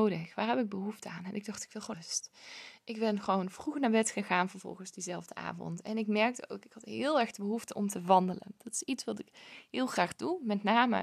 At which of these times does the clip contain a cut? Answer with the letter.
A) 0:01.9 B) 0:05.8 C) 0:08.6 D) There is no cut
A